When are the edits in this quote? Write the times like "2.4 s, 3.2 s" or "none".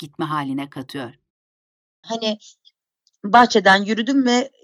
2.0 s

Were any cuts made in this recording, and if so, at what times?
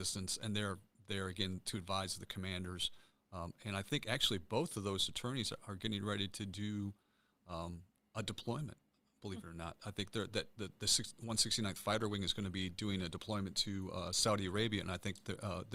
none

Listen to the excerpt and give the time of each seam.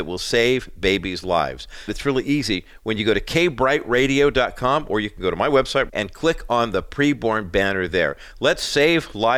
1.9 s, 5.9 s

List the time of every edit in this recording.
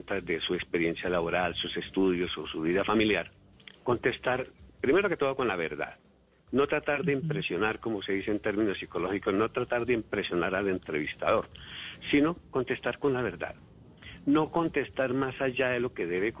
none

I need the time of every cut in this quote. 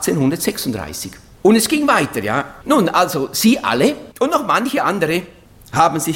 2.6 s, 4.1 s

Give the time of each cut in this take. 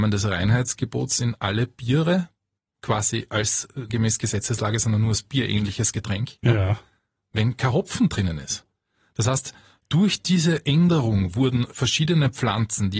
3.9 s

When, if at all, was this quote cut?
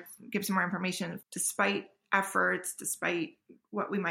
1.2 s

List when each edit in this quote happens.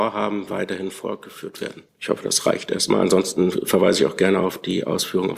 1.9 s

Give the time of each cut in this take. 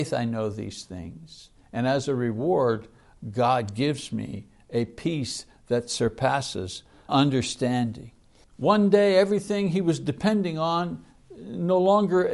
7.1 s, 8.4 s

